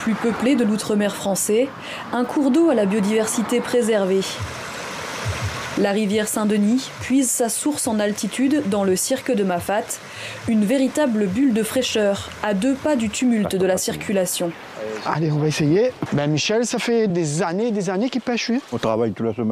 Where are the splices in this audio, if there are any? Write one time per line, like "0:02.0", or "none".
0:16.1
0:17.1